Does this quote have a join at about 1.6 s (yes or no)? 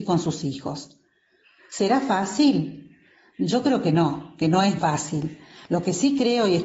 no